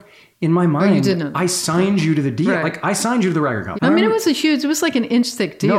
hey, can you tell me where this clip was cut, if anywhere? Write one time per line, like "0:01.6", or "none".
0:03.7